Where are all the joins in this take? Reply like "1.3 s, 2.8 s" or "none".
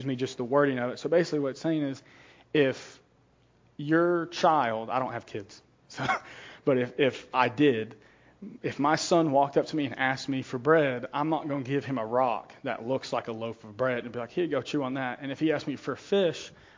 none